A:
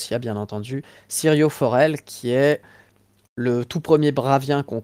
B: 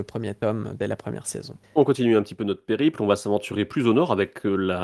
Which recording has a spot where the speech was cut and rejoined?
B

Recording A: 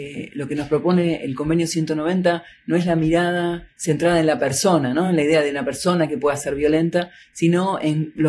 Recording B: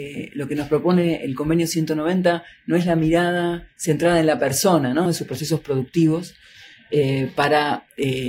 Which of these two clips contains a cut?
B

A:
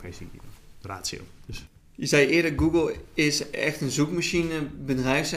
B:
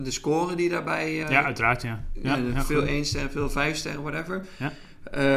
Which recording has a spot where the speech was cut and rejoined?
B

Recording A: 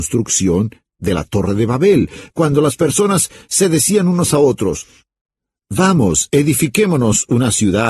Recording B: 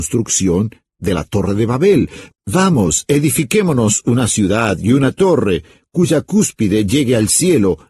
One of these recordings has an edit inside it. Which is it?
B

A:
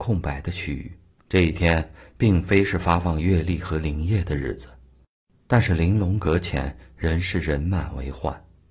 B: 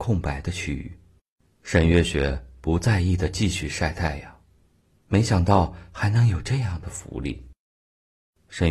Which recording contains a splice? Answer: A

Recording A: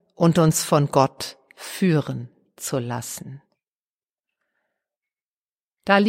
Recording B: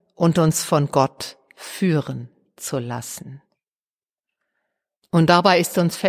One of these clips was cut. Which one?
B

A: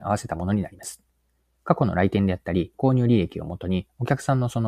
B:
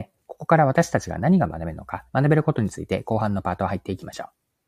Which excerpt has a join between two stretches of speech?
B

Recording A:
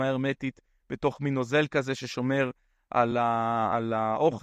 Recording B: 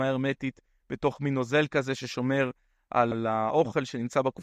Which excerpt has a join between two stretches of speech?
B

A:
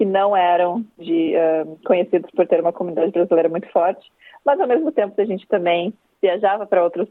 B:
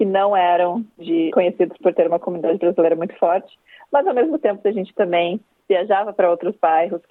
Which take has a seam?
B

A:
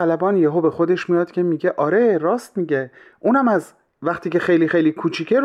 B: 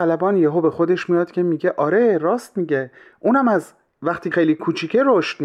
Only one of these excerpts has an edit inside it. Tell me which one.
B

